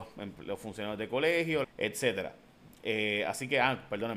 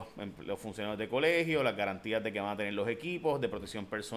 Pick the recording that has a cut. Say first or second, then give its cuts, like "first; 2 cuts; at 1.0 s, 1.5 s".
first; 1 cut; at 1.6 s